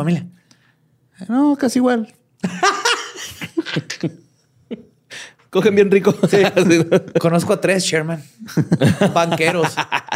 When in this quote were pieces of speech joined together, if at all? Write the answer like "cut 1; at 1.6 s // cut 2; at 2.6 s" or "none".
none